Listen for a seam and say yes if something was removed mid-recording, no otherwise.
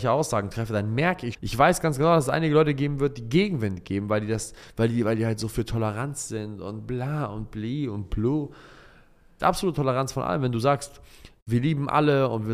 yes